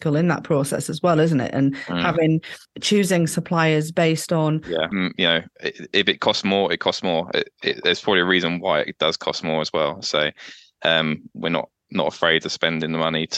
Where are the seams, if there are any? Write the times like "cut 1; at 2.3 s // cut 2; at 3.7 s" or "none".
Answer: cut 1; at 4.9 s